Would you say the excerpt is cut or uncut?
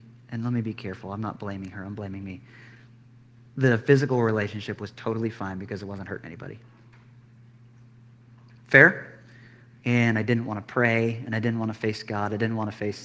cut